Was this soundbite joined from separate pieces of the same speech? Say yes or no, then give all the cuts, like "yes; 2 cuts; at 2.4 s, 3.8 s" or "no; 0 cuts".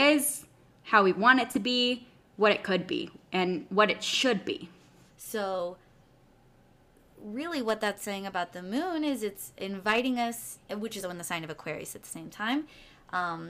yes; 2 cuts; at 5.1 s, 11.0 s